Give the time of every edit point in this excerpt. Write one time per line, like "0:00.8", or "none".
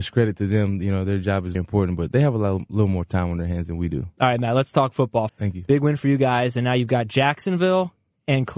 0:01.5
0:05.3